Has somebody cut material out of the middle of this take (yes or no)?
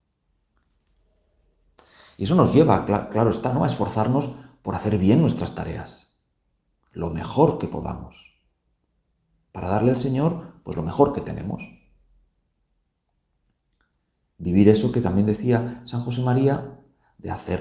no